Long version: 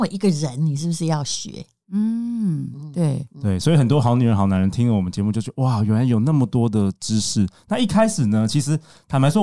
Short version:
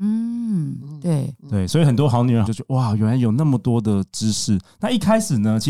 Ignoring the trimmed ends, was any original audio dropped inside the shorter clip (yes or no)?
yes